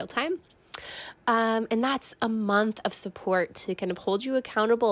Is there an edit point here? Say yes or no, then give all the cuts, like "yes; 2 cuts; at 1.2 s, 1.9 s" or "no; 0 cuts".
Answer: no; 0 cuts